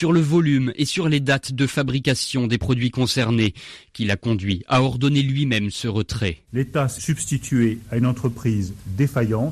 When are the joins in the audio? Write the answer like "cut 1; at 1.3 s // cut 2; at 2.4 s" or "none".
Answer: cut 1; at 7.0 s